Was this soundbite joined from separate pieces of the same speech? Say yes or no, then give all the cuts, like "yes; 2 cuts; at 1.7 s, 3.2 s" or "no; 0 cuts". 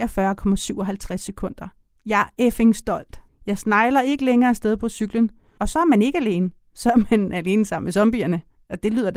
yes; 2 cuts; at 3.3 s, 5.6 s